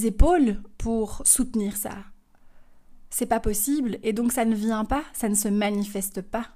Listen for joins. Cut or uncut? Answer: uncut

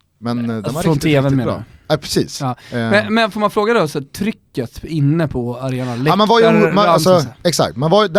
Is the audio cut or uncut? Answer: uncut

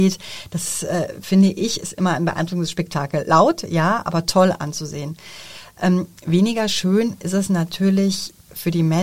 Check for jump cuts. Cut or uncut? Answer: uncut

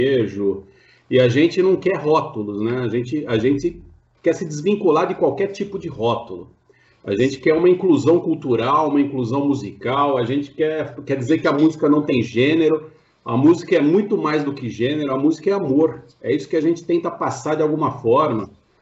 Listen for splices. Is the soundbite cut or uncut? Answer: uncut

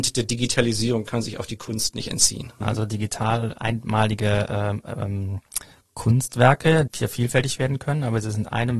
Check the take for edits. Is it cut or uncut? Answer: cut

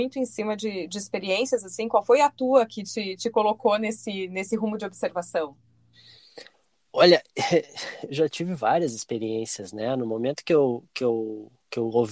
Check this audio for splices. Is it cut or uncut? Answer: uncut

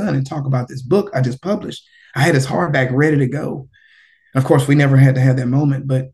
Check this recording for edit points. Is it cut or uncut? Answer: uncut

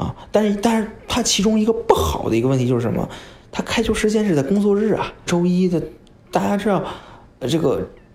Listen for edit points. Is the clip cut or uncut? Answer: cut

